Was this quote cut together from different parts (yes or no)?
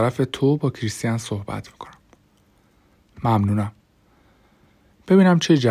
no